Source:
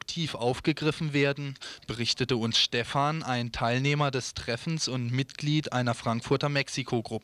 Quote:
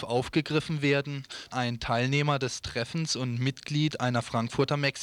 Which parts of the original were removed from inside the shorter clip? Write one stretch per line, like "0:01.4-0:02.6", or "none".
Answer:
0:01.8-0:03.2